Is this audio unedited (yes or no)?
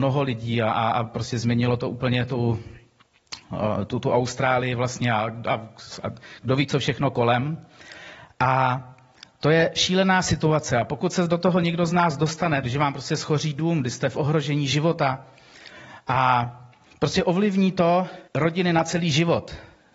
no